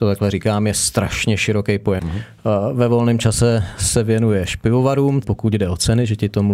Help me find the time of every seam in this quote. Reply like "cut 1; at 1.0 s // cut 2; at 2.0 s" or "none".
cut 1; at 2.0 s // cut 2; at 5.2 s

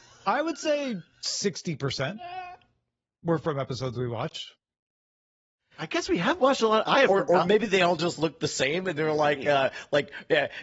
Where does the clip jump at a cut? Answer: none

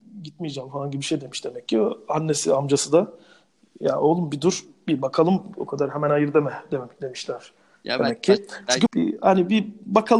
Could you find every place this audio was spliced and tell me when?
cut 1; at 8.9 s

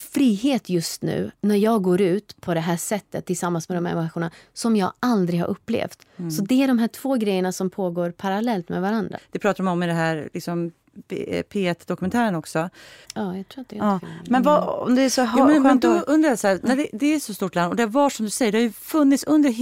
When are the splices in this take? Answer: cut 1; at 9.2 s // cut 2; at 13.0 s

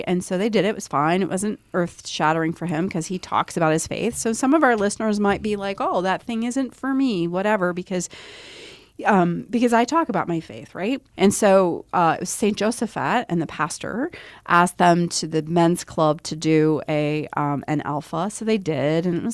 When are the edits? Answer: cut 1; at 11.1 s

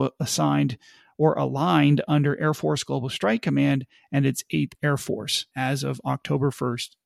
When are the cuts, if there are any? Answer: cut 1; at 5.5 s

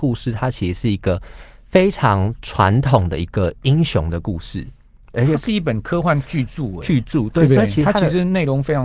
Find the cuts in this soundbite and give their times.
none

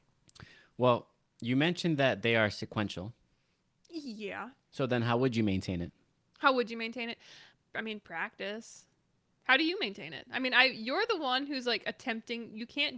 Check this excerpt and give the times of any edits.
none

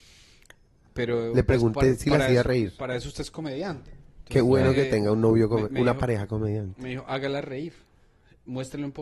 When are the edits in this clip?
none

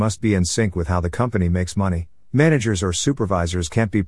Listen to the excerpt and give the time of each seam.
cut 1; at 2.3 s

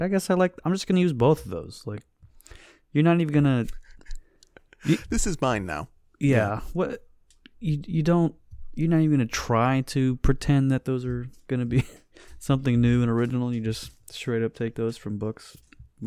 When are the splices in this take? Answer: none

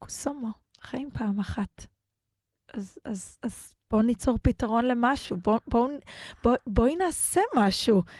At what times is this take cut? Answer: none

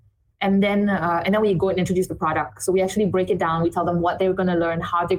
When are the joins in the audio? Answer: none

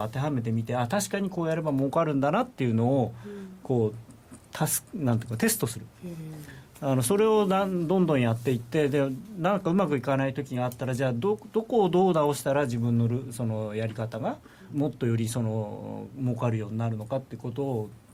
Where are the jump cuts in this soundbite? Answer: cut 1; at 14.7 s

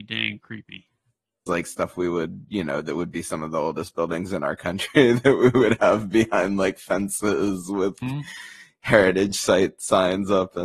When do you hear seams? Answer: cut 1; at 1.5 s // cut 2; at 8.0 s

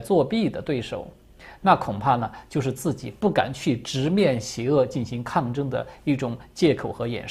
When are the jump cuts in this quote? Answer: cut 1; at 1.6 s

